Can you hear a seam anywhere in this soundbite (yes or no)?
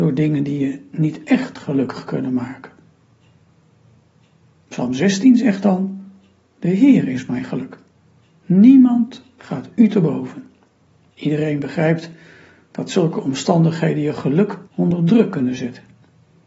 yes